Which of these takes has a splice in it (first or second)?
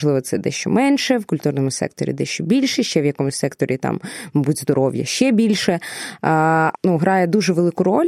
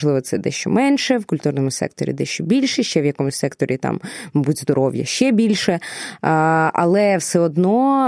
first